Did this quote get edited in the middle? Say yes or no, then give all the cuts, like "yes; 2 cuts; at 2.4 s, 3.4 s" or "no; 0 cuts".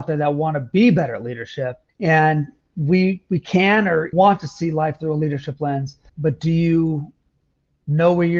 yes; 3 cuts; at 1.9 s, 4.1 s, 6.1 s